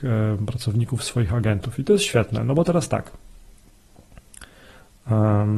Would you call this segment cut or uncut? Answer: uncut